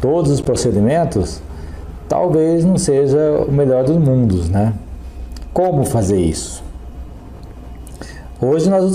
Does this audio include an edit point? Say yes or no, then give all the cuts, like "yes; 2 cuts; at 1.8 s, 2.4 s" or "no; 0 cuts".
yes; 1 cut; at 5.5 s